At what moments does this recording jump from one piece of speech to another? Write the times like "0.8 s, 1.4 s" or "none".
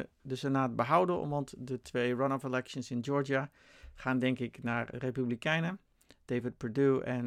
4.9 s